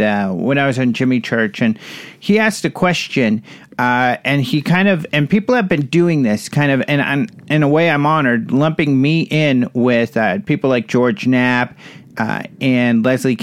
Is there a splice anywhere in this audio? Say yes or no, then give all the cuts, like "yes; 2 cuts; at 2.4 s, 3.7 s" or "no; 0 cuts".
no; 0 cuts